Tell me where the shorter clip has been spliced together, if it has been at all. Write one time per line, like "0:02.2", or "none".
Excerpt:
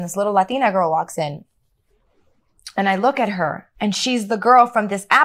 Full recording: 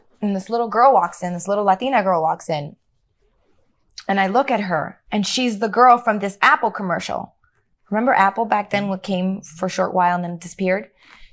none